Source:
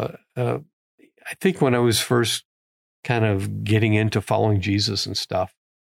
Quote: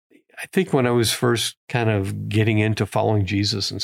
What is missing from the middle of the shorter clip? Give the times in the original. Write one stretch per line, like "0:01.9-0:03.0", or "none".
0:02.5-0:02.9